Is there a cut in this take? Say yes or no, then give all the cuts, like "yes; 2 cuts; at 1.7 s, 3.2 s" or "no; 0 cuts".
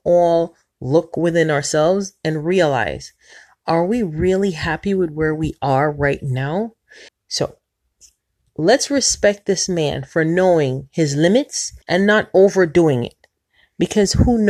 yes; 2 cuts; at 7.1 s, 11.8 s